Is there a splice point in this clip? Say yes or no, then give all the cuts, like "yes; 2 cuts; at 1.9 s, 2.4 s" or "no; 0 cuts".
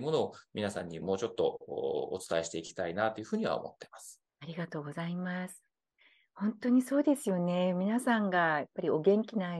no; 0 cuts